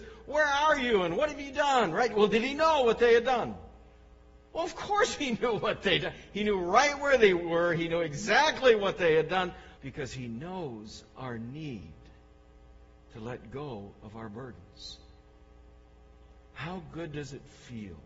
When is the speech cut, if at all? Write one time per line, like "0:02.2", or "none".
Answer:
0:09.8